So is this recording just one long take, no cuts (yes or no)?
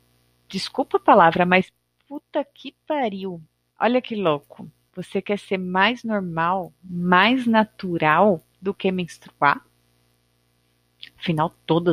no